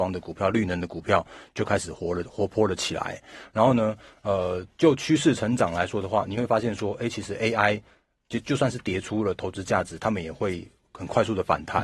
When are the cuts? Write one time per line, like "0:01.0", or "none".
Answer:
none